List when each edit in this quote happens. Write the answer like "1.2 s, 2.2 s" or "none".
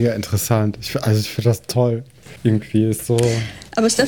none